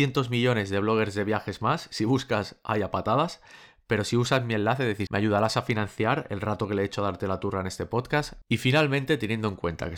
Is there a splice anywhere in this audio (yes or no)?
yes